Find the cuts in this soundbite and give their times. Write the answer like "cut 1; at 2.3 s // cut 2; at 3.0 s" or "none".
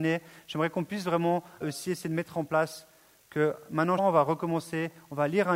cut 1; at 1.6 s // cut 2; at 4.0 s